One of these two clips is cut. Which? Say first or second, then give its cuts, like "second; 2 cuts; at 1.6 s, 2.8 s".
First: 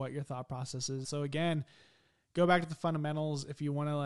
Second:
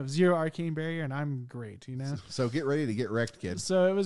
first; 1 cut; at 1.0 s